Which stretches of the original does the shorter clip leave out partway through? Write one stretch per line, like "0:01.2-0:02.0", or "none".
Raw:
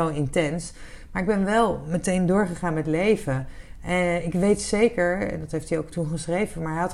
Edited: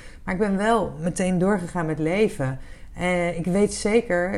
none

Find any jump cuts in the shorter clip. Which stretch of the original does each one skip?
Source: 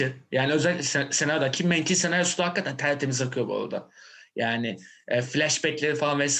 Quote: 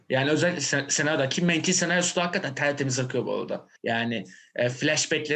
0:04.0-0:04.3

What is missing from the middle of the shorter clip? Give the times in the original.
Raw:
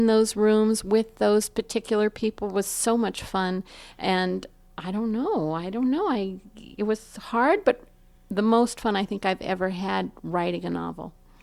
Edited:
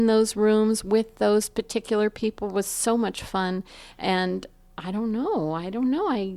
none

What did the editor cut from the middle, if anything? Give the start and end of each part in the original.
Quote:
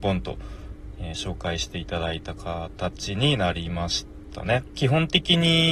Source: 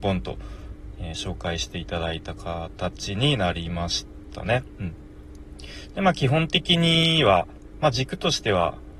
0:04.7-0:06.1

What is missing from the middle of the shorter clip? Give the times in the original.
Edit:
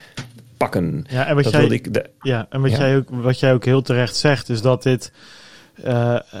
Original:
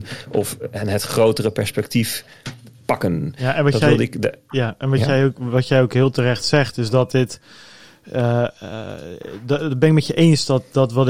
none

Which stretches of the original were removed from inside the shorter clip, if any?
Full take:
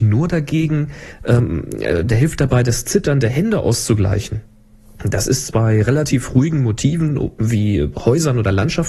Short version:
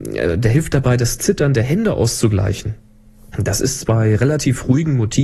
none

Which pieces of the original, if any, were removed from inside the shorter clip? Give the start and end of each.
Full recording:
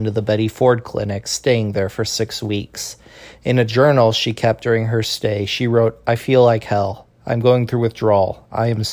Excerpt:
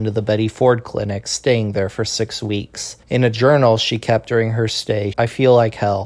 0:03.0-0:03.4
0:05.5-0:06.0

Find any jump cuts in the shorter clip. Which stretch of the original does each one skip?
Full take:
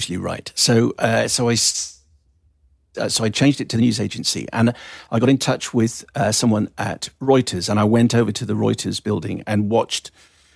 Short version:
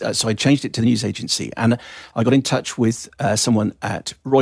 none

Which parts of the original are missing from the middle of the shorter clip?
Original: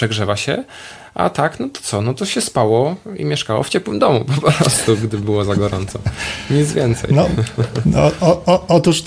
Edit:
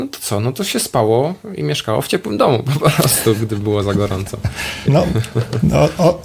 0:06.5-0:07.1

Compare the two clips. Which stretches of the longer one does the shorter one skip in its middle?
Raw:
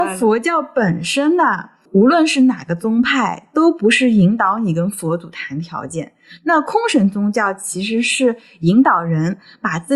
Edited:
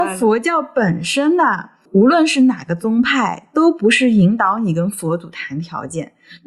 none

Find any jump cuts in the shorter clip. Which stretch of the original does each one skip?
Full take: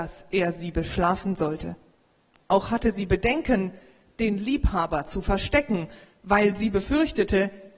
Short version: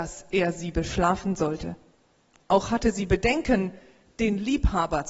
none

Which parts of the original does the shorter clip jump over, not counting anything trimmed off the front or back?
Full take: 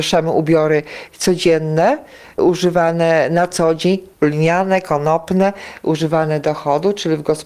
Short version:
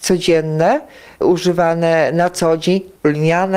none

